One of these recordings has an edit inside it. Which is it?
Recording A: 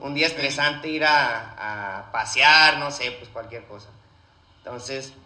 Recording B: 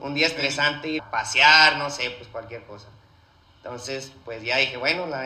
B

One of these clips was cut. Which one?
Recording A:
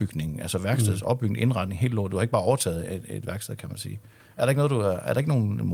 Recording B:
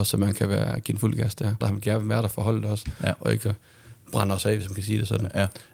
B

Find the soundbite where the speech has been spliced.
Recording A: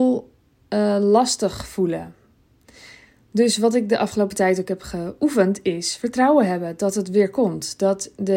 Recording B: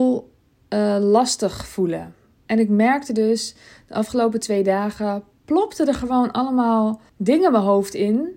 B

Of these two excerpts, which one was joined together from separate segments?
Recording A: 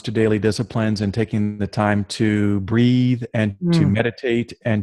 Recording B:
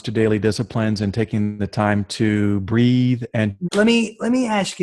B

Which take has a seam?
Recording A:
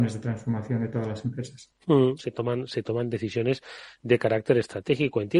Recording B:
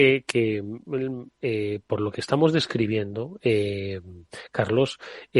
A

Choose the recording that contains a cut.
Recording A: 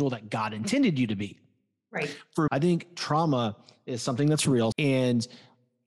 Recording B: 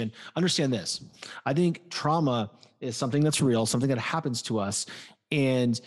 A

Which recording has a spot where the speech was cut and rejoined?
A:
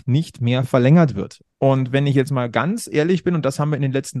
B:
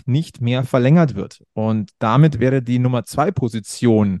A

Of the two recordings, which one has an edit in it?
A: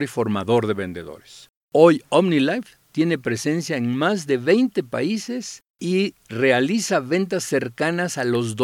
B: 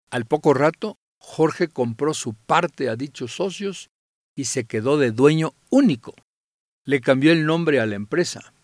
A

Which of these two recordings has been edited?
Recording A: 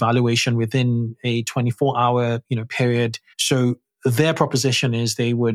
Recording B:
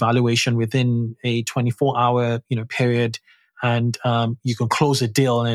A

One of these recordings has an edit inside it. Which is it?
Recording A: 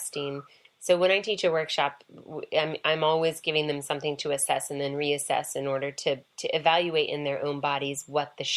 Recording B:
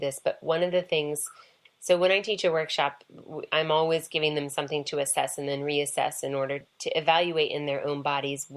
B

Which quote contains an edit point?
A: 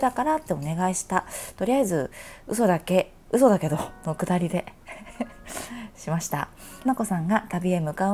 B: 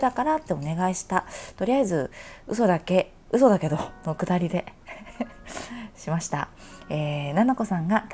A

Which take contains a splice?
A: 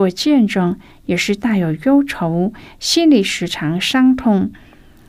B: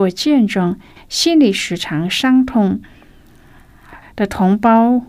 B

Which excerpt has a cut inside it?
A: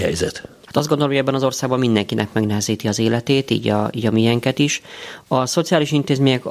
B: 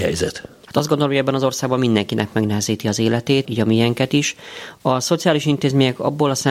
B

